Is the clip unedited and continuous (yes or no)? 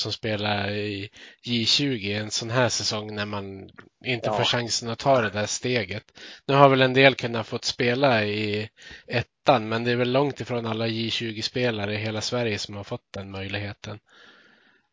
yes